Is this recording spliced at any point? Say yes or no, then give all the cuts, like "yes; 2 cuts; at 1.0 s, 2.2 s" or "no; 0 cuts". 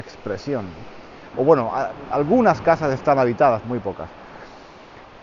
yes; 2 cuts; at 1.3 s, 3.6 s